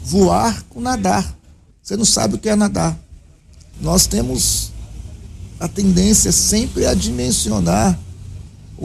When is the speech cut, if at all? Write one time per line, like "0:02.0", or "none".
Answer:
0:01.7
0:03.7